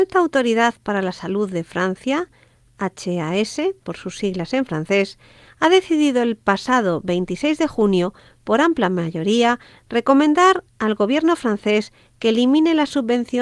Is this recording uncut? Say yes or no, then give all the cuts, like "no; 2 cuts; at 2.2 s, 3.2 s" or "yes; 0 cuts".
yes; 0 cuts